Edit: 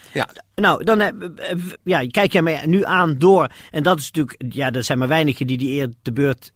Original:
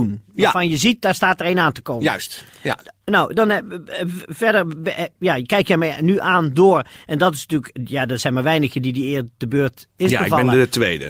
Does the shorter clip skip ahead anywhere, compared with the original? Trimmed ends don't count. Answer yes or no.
yes